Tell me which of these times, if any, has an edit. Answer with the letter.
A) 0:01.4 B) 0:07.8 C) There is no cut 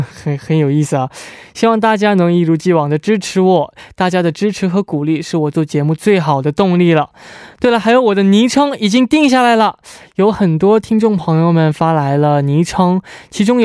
C